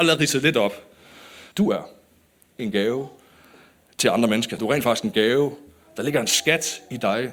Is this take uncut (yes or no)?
no